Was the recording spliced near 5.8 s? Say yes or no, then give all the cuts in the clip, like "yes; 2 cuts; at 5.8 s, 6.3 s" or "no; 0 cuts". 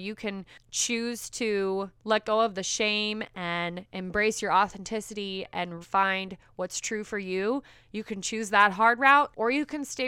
yes; 1 cut; at 5.8 s